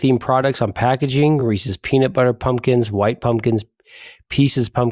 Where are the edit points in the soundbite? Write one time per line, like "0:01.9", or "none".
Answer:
none